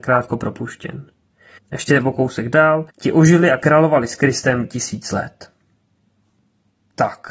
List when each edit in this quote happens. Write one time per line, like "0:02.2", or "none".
0:01.6
0:02.9